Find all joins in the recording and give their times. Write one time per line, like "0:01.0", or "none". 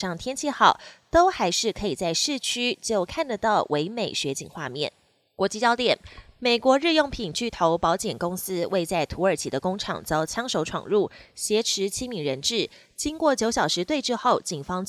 none